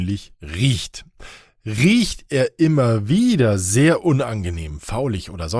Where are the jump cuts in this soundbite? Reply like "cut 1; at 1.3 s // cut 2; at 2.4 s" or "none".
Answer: none